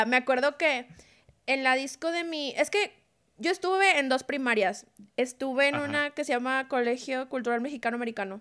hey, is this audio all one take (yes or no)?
yes